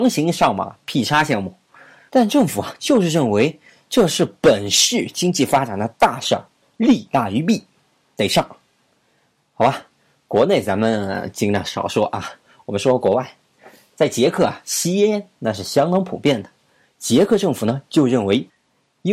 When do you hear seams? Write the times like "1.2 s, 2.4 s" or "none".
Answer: 2.1 s

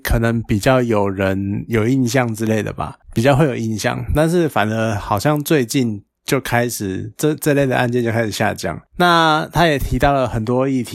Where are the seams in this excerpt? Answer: none

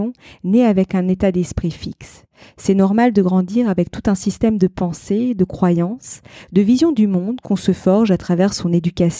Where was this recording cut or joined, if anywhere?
none

